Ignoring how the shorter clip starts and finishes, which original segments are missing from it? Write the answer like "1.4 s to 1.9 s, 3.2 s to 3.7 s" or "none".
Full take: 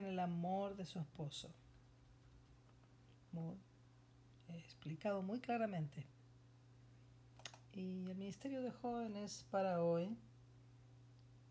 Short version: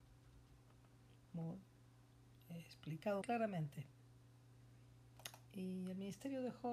5.2 s to 5.4 s